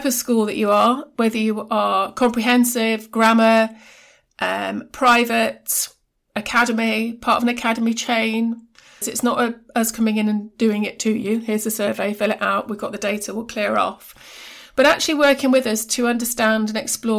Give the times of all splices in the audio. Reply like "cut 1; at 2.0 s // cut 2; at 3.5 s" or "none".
cut 1; at 9.0 s